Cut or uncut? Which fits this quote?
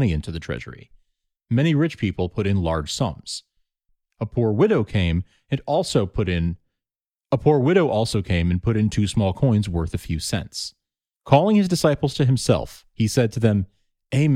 uncut